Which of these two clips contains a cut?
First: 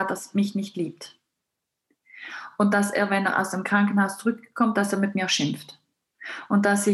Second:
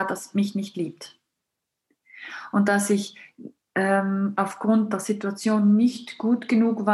second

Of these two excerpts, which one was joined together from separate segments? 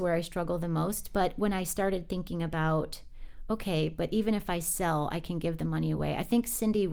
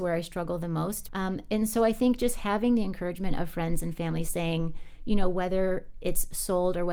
second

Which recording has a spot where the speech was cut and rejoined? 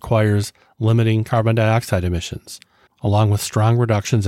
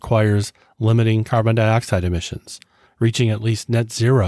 first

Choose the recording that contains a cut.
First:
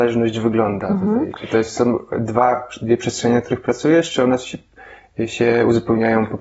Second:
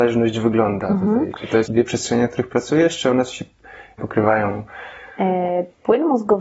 second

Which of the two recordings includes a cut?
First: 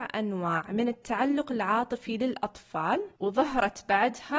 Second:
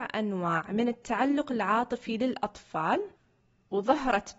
first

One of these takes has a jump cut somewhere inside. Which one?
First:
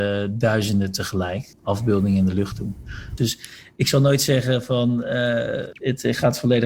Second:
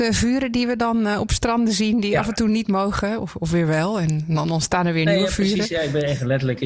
first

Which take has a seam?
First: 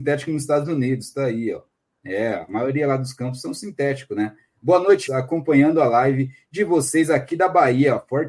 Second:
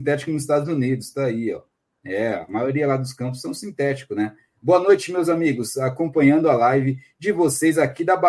first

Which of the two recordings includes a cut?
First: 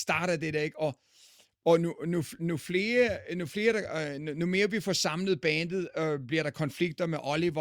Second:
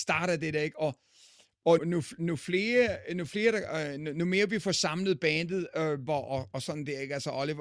second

